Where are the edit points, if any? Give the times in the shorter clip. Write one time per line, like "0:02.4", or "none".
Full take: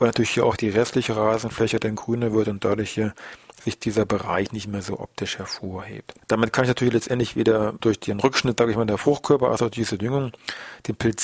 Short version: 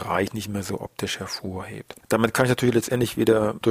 none